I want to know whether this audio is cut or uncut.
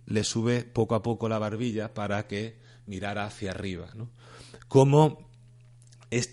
uncut